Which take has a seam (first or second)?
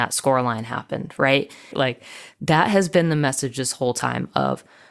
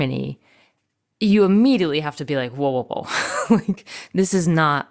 first